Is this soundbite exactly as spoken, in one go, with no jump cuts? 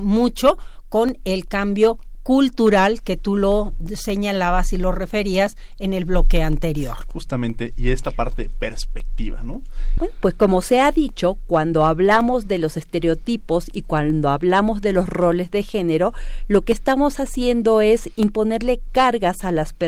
no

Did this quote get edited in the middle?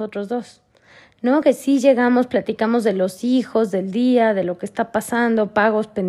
no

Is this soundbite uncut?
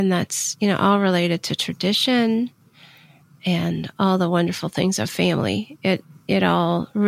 yes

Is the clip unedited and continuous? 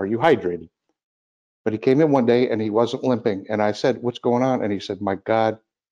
no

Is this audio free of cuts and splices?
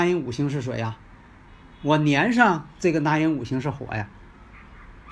yes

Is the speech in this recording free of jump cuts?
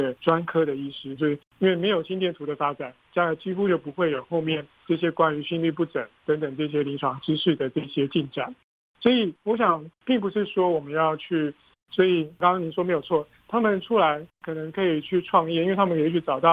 no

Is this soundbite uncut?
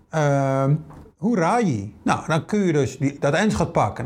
yes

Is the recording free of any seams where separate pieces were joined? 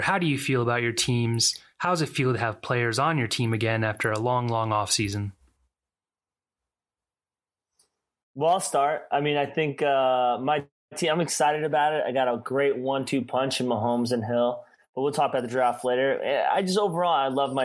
yes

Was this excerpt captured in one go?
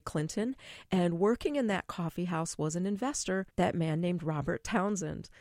no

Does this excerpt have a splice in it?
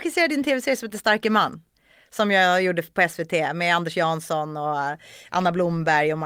no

